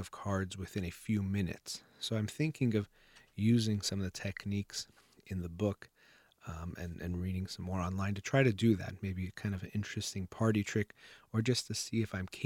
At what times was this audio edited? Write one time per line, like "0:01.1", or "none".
none